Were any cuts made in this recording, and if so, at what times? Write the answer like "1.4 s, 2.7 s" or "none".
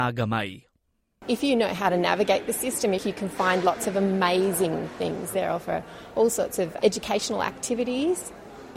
3.0 s, 5.3 s, 6.8 s